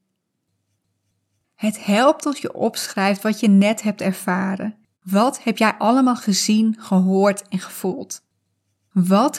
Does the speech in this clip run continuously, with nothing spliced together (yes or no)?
no